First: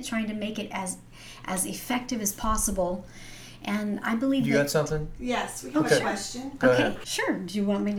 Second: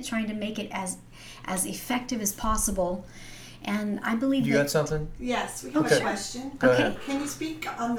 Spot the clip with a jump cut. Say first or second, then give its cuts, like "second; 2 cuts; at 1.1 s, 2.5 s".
first; 1 cut; at 7.0 s